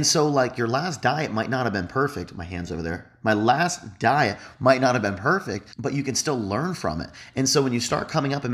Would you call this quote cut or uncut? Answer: cut